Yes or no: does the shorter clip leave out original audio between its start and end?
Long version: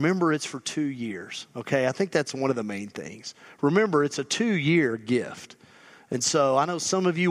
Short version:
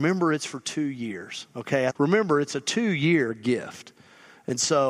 yes